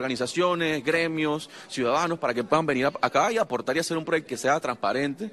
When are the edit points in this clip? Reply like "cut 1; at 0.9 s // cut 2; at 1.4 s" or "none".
cut 1; at 4.3 s